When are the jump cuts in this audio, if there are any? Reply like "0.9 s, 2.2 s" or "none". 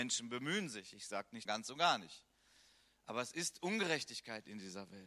1.5 s